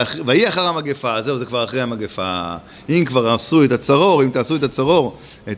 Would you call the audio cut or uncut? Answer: uncut